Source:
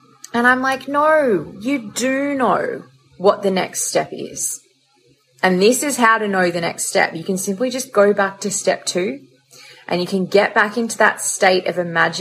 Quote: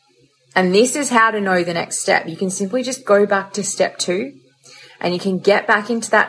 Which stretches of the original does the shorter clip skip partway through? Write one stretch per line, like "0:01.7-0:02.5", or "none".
none